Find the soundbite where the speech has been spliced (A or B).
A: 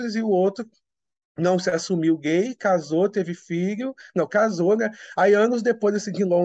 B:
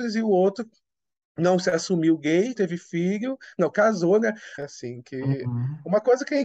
B